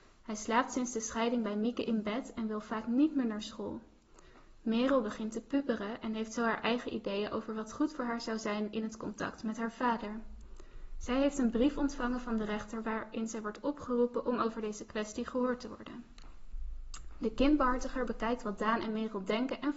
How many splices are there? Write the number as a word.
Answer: zero